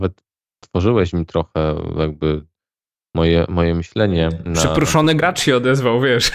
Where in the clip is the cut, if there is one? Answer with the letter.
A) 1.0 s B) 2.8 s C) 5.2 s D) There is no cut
D